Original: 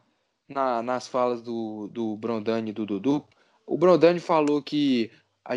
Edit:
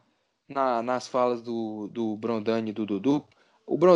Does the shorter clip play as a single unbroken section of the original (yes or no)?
yes